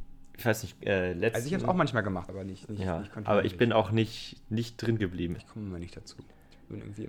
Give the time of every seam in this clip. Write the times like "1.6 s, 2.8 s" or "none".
2.3 s, 5.4 s